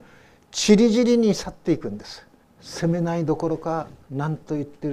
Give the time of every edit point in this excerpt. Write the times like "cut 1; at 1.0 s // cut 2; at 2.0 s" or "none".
cut 1; at 2.4 s